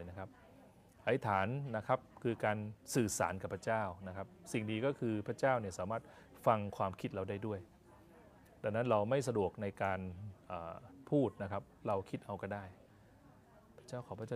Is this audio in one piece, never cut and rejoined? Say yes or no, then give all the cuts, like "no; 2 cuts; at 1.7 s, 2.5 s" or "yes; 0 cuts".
yes; 0 cuts